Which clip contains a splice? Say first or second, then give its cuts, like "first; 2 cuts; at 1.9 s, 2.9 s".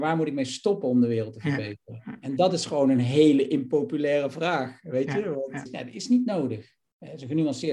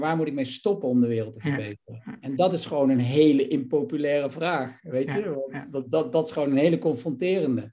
first; 1 cut; at 5.7 s